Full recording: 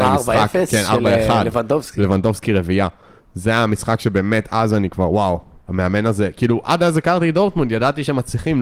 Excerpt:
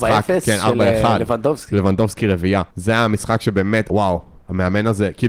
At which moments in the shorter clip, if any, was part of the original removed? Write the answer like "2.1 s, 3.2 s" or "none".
2.7 s, 3.9 s